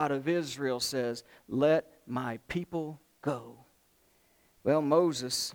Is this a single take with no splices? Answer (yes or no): yes